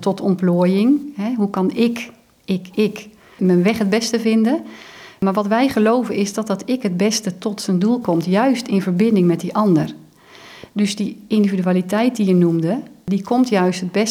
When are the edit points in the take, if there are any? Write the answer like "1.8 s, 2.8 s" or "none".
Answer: none